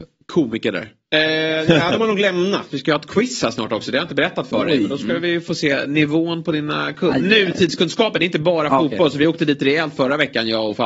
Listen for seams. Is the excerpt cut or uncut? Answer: cut